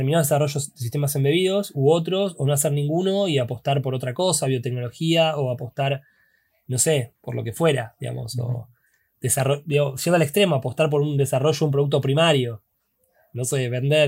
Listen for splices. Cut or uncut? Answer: uncut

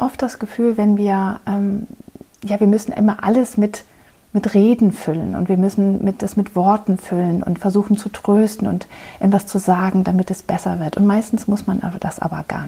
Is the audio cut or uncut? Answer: uncut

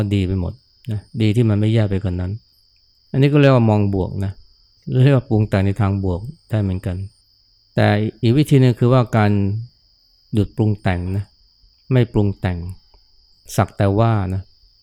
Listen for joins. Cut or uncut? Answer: uncut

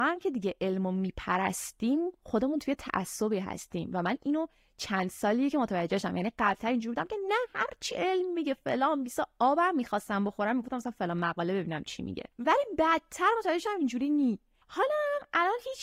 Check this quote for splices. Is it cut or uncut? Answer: cut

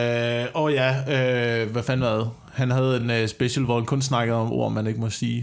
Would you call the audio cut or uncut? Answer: uncut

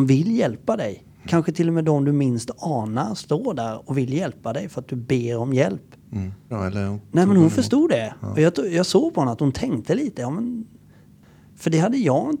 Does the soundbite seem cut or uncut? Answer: cut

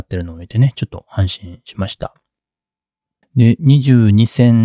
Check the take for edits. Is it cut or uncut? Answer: cut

